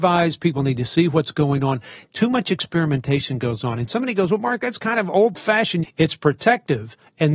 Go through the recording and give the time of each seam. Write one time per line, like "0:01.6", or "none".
0:05.8